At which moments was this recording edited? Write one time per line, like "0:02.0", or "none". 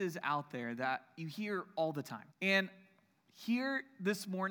0:02.3